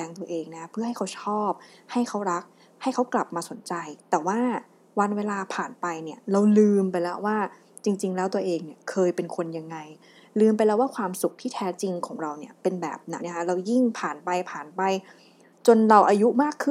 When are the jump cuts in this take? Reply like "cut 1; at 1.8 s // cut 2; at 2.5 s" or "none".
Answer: cut 1; at 13.2 s